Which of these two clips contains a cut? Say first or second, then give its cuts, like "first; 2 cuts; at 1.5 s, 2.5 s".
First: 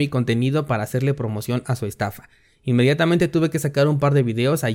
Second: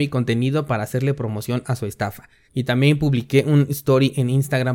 second; 1 cut; at 2.5 s